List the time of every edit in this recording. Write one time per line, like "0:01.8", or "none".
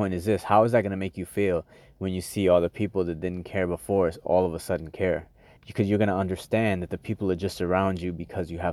0:05.6